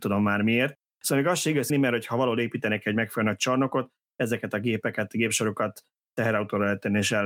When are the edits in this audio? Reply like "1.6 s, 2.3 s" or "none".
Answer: 1.7 s

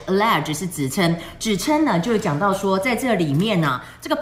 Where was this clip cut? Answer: none

